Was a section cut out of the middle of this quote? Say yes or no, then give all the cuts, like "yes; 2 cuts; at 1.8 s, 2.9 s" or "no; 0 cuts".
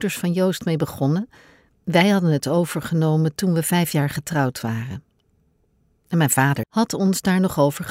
yes; 1 cut; at 6.6 s